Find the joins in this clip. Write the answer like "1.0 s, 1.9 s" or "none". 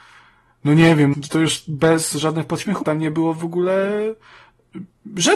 1.1 s, 2.8 s